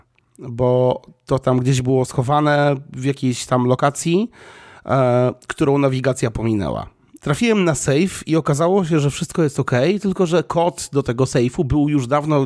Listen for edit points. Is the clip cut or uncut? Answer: cut